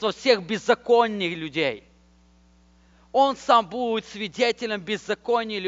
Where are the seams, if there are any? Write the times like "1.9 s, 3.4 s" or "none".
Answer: none